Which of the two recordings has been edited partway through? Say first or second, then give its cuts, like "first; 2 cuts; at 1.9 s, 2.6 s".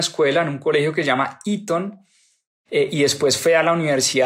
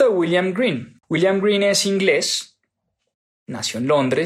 second; 1 cut; at 1.0 s